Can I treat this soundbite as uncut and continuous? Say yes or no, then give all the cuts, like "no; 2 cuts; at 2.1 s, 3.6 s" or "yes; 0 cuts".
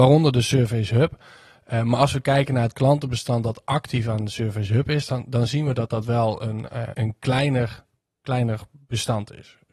no; 1 cut; at 6.9 s